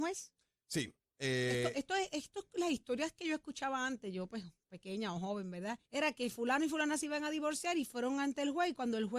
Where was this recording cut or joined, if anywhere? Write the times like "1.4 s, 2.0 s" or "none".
5.8 s